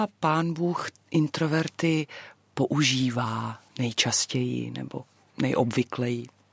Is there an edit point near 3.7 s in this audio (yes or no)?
yes